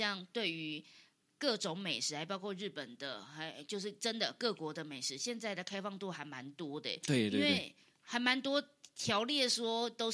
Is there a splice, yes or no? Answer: no